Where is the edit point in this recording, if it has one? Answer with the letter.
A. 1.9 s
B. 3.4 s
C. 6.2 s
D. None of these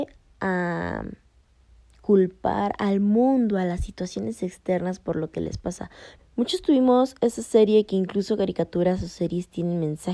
C